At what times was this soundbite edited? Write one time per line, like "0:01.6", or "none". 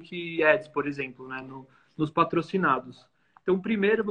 none